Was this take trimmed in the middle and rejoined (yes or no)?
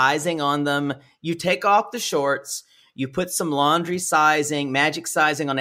no